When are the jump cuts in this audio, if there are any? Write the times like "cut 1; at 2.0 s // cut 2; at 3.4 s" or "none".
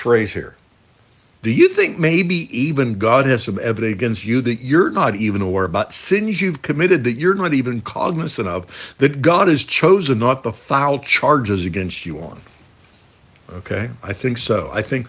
cut 1; at 1.3 s